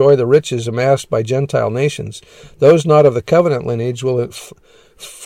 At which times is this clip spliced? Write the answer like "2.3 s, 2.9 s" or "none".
4.3 s